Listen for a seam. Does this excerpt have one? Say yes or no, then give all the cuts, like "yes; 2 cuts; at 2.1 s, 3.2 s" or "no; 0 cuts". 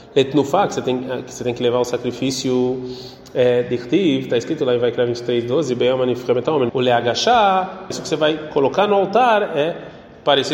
yes; 2 cuts; at 6.7 s, 7.9 s